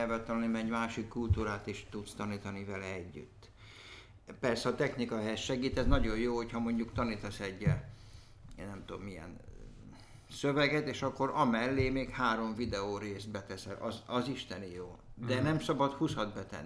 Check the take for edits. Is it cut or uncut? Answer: uncut